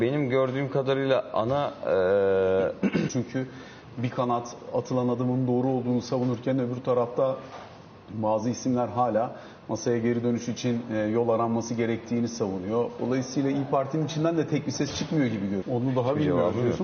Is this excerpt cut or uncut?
cut